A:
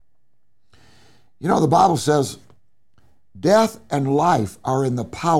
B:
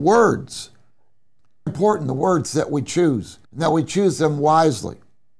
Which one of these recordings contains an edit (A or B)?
B